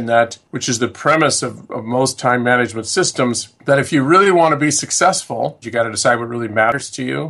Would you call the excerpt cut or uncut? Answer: cut